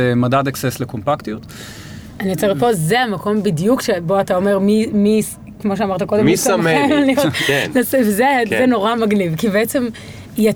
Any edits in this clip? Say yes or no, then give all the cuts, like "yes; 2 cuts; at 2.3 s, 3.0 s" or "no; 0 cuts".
no; 0 cuts